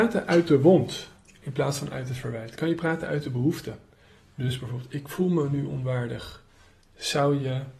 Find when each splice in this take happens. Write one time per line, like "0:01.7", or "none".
none

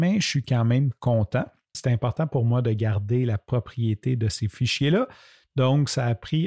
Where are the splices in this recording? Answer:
0:01.7

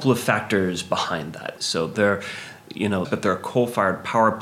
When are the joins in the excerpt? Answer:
0:01.6
0:03.0

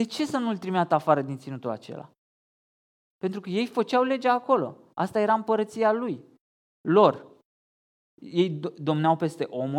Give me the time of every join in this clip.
none

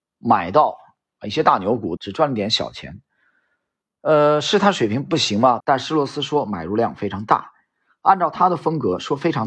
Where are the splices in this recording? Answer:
0:02.0
0:05.6

